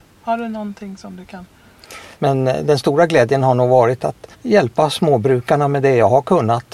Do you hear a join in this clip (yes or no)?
yes